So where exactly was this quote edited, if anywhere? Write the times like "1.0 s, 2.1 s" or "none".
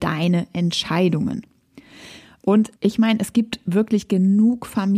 2.8 s

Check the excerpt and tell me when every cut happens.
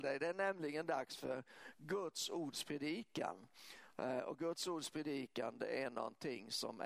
none

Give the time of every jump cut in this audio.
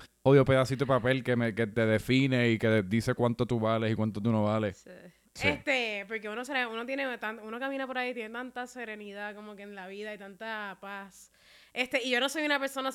5.3 s

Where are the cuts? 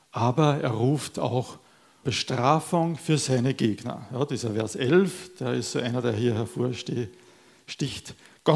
2.0 s

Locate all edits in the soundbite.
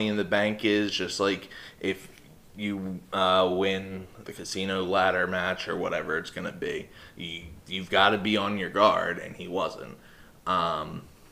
4.2 s

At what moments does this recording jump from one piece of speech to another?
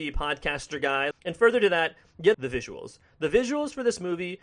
1.1 s, 2.3 s

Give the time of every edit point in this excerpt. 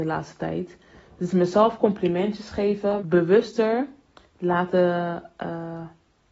3.0 s

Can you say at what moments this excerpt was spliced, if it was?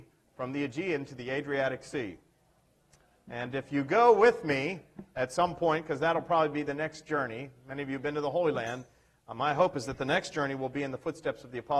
none

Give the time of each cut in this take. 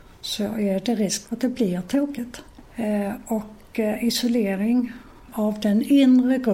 1.2 s, 2.6 s

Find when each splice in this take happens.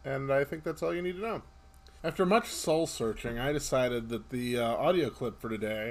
2.0 s

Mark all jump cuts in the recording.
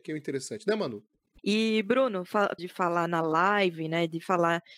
1.4 s, 2.6 s

